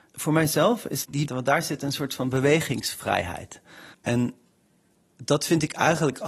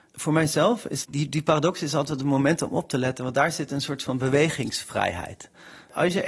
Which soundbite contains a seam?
first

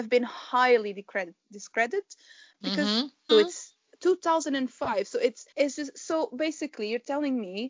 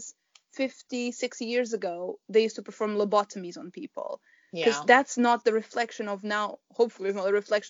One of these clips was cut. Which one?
first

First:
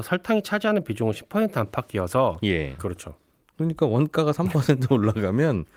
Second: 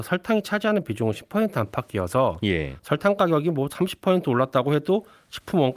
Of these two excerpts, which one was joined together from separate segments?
first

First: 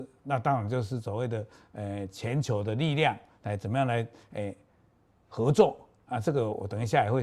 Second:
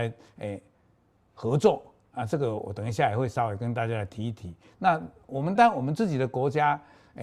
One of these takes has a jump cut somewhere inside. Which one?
second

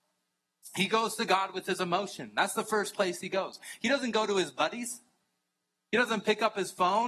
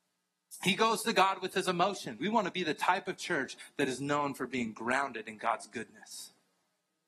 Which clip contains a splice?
second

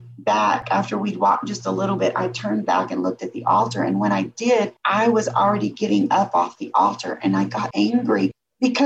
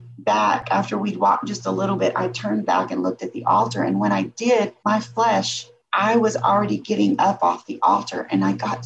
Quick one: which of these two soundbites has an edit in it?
first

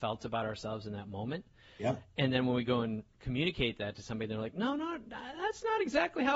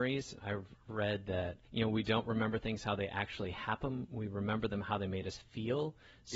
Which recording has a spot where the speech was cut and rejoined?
second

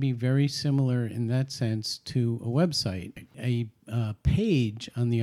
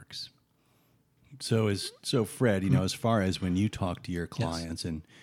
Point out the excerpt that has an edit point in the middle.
first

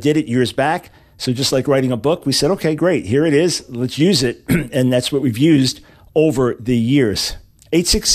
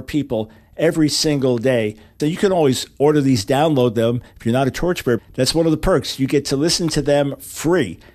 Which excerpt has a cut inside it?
second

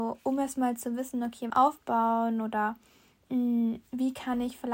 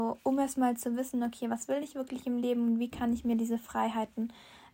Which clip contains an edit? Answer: first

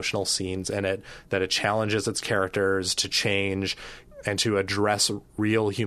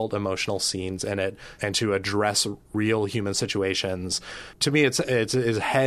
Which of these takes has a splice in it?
second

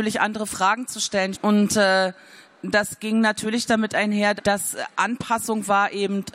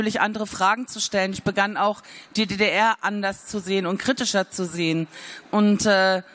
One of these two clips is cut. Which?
first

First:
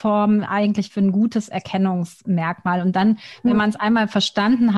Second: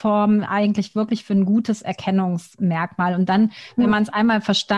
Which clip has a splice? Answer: first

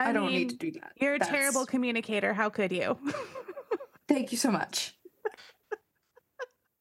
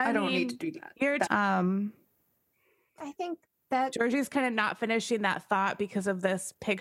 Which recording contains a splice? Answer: second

